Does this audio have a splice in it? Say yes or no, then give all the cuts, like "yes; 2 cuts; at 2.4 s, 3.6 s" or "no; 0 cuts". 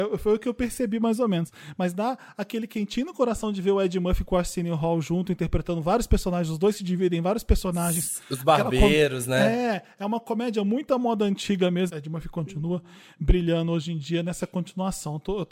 yes; 1 cut; at 11.9 s